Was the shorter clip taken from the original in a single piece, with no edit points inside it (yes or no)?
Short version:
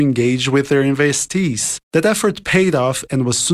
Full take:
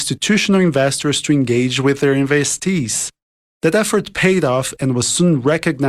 no